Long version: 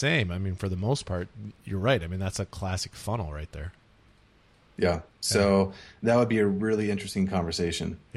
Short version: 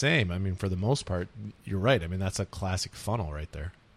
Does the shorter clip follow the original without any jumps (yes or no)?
yes